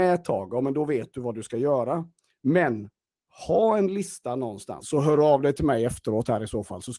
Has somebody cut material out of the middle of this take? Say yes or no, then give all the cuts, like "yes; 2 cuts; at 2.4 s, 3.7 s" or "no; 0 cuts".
yes; 1 cut; at 4.8 s